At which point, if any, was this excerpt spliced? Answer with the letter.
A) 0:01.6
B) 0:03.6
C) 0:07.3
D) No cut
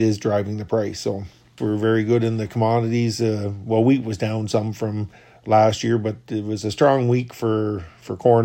A